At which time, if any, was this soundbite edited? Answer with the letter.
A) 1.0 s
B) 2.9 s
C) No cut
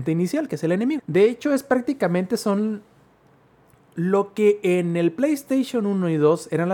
A